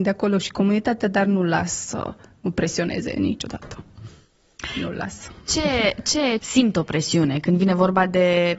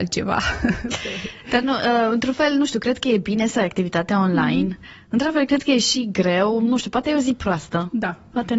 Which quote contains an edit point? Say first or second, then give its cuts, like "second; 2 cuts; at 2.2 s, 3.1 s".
first; 1 cut; at 6.4 s